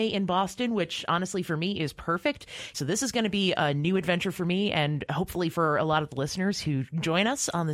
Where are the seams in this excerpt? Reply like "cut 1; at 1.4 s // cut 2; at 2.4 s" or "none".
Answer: cut 1; at 2.7 s

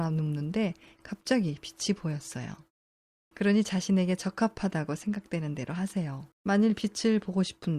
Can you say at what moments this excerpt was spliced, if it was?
cut 1; at 3.3 s // cut 2; at 6.3 s

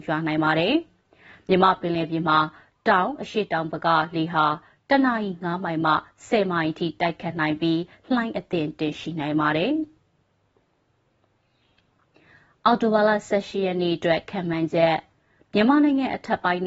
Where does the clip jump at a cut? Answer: none

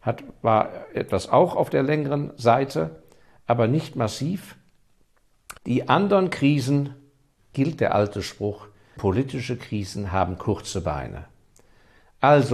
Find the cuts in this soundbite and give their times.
cut 1; at 5.6 s // cut 2; at 7.4 s // cut 3; at 9.0 s

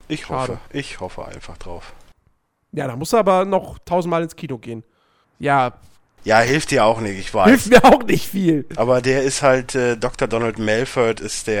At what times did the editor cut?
cut 1; at 5.2 s

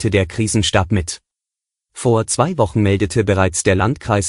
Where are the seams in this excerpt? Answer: cut 1; at 1.9 s

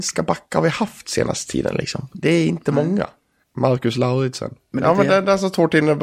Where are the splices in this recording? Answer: cut 1; at 3.4 s // cut 2; at 4.7 s

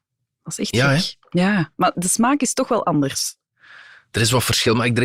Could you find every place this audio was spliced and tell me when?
cut 1; at 1.9 s

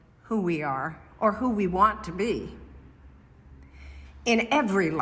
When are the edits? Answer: cut 1; at 1.1 s

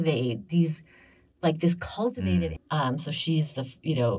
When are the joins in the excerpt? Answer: cut 1; at 2.6 s

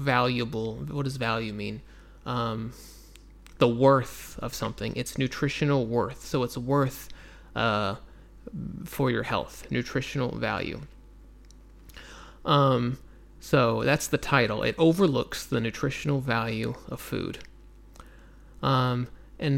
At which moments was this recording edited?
none

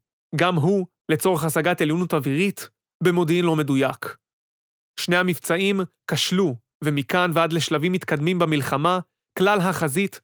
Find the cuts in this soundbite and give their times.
none

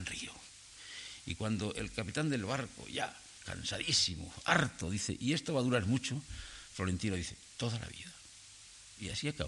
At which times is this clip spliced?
none

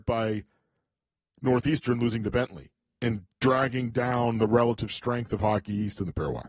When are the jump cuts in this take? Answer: cut 1; at 3.3 s

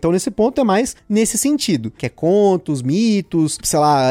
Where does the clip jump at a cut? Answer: cut 1; at 2.0 s

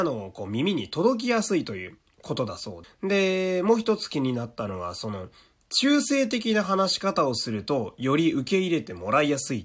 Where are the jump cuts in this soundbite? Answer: cut 1; at 2.8 s

